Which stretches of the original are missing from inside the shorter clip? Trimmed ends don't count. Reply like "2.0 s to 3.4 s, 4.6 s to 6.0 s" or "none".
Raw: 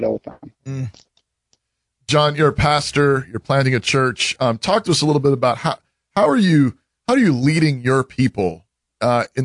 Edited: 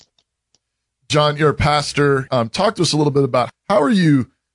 3.3 s to 4.4 s, 5.6 s to 6.0 s